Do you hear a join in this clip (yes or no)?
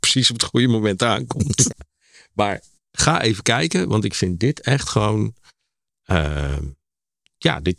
yes